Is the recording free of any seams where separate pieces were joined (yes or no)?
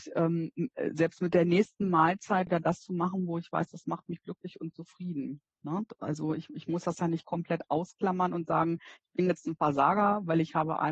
no